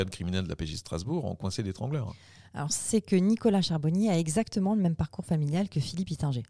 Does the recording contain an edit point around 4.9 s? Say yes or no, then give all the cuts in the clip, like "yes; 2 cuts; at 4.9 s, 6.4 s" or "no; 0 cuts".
no; 1 cut; at 2.7 s